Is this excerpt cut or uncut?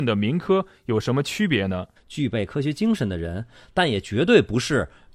cut